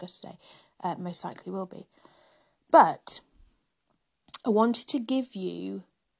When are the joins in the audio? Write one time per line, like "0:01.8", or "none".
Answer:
none

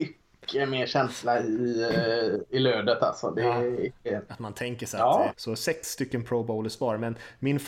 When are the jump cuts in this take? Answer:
0:04.3
0:05.3

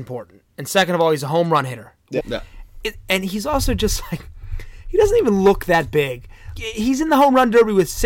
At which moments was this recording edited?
0:02.2
0:06.6

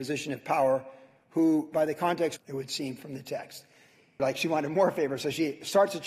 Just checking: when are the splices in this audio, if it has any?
0:02.4
0:04.2

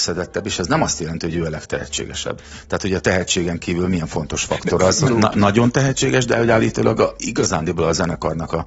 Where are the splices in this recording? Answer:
0:05.1

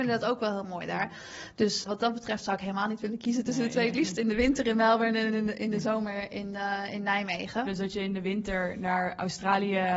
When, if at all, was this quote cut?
0:01.8
0:07.6

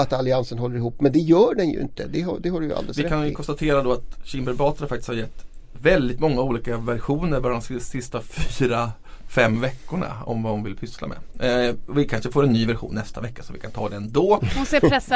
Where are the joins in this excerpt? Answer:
none

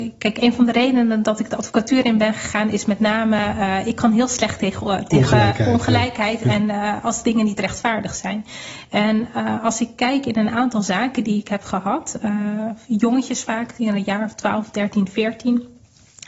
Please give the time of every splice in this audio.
none

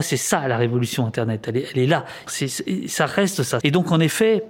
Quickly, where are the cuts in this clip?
0:02.3
0:03.6

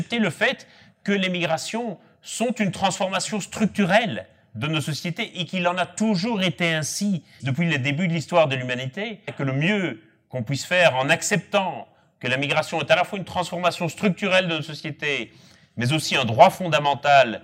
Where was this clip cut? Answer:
0:07.4
0:09.3

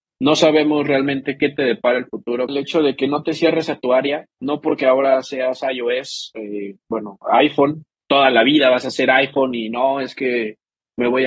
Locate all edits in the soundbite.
0:02.5

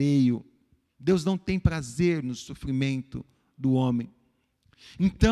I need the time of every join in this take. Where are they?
none

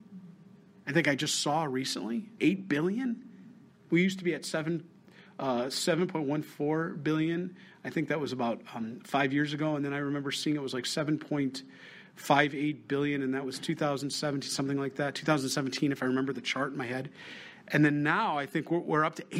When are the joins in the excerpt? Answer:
0:02.4

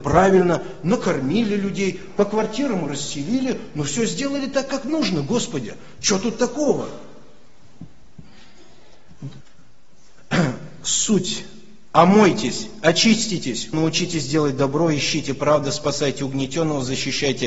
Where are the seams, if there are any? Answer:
0:09.4
0:13.7

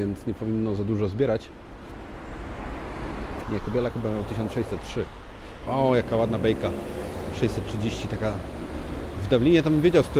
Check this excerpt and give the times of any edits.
0:03.4
0:05.7

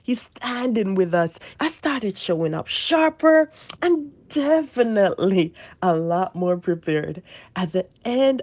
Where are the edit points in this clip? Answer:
0:01.5
0:03.8

